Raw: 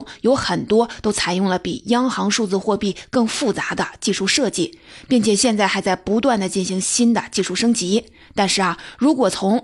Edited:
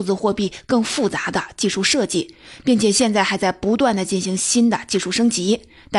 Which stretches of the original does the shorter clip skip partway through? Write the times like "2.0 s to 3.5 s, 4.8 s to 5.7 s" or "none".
none